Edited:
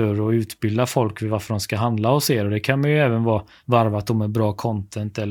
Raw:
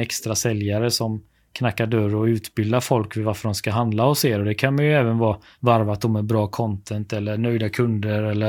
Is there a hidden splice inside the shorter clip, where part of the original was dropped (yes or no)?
no